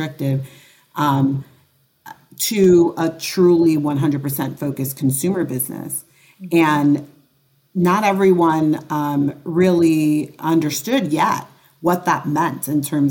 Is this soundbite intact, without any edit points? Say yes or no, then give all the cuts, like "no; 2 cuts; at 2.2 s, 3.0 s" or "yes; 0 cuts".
yes; 0 cuts